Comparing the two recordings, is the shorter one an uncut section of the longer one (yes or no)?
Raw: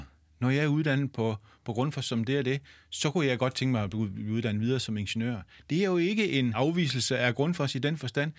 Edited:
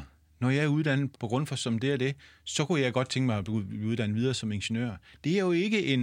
no